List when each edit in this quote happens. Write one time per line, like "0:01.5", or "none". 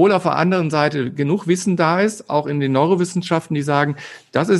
none